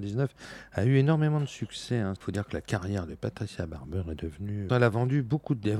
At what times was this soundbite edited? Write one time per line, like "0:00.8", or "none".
0:02.2
0:04.7